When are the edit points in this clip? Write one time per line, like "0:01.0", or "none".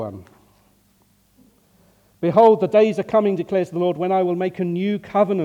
none